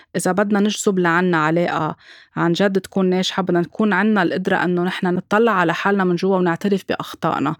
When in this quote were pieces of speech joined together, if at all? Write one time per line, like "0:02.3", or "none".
none